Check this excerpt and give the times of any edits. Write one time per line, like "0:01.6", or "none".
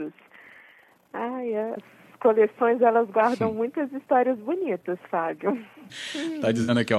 0:01.8
0:05.9